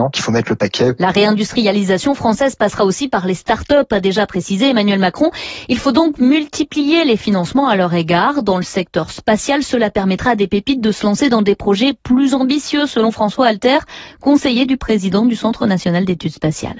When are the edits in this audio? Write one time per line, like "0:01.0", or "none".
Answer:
none